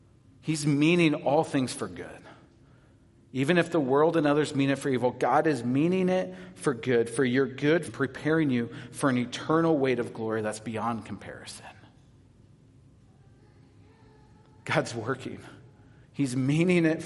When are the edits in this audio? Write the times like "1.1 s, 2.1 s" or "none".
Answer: 7.9 s